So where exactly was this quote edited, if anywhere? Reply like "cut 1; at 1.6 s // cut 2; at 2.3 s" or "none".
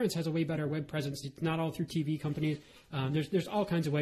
cut 1; at 1.2 s